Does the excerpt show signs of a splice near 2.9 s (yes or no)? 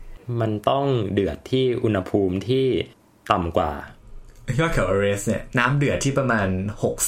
no